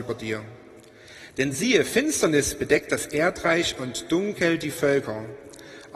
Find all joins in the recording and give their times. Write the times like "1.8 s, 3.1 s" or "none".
none